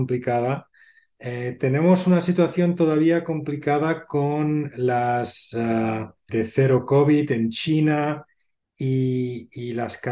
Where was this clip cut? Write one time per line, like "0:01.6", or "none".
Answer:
0:06.3